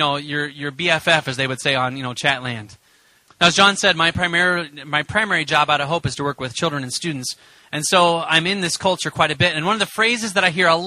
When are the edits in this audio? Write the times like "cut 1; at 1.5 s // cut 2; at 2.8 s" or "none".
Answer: cut 1; at 3.3 s